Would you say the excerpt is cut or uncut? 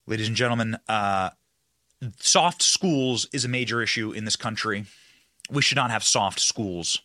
uncut